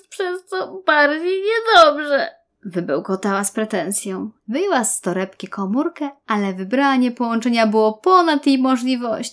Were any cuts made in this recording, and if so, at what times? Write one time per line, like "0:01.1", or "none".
0:04.4